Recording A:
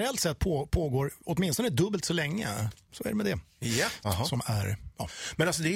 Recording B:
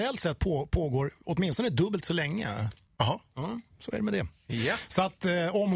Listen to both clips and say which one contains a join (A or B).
A